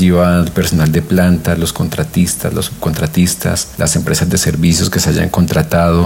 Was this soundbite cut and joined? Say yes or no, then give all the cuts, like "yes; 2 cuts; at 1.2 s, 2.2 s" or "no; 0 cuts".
no; 0 cuts